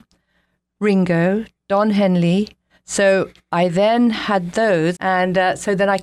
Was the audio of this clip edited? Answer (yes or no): yes